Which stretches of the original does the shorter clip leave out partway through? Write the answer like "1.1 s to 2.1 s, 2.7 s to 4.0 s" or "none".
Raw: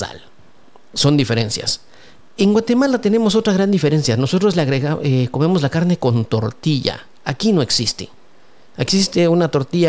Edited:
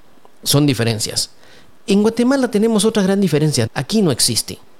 4.2 s to 7.2 s